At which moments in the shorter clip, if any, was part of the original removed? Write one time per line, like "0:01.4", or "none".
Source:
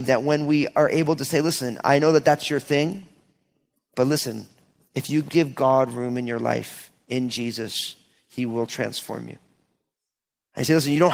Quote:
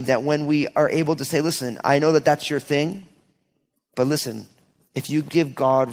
none